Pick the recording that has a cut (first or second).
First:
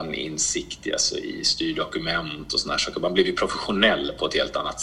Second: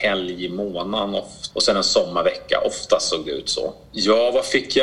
second